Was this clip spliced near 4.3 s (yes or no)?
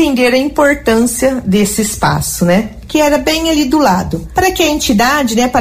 no